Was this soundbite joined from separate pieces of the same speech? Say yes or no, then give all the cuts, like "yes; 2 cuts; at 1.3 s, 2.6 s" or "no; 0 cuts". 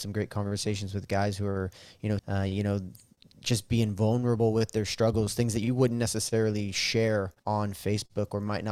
yes; 2 cuts; at 2.2 s, 7.4 s